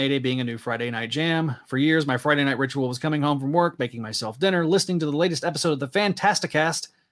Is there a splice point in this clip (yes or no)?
no